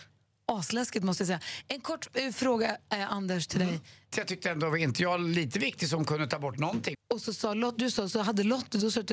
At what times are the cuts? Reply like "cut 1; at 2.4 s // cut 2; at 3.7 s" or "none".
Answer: cut 1; at 4.1 s // cut 2; at 6.9 s